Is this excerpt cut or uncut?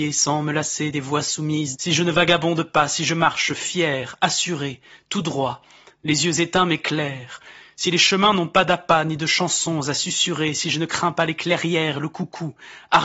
cut